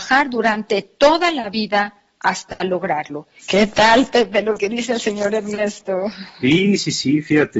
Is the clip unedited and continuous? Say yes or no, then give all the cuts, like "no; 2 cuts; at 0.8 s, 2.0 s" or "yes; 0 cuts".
no; 1 cut; at 3.4 s